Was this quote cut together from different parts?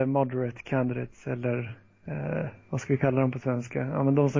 no; 0 cuts

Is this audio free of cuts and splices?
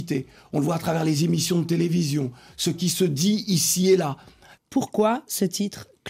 no; 1 cut; at 4.5 s

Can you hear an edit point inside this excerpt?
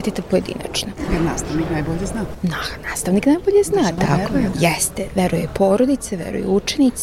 yes; 1 cut; at 4.5 s

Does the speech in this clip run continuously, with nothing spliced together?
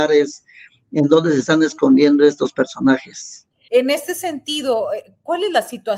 no; 1 cut; at 3.7 s

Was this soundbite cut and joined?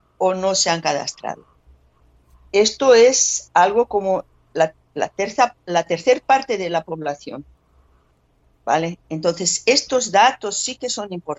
no; 0 cuts

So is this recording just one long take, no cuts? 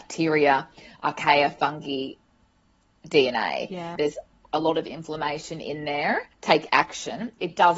no; 2 cuts; at 4.0 s, 6.3 s

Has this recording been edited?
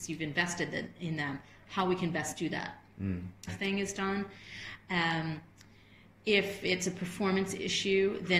yes; 1 cut; at 3.5 s

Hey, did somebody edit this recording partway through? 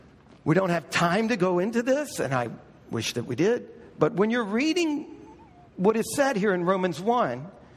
no; 0 cuts

